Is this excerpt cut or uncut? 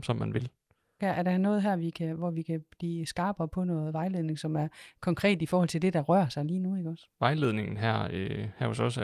cut